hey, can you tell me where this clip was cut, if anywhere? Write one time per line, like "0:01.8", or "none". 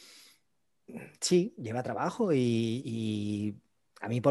none